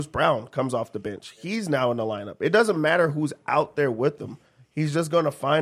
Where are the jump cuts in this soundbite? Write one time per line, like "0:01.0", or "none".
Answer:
none